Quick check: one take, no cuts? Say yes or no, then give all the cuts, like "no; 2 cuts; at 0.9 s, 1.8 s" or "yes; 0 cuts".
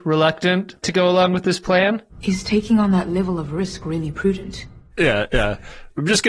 no; 1 cut; at 4.9 s